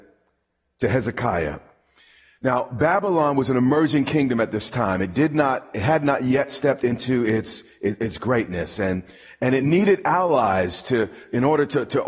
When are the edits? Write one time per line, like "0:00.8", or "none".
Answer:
none